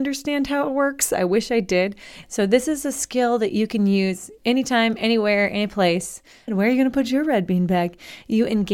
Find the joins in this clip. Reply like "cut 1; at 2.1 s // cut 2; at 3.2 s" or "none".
cut 1; at 2.2 s // cut 2; at 6.5 s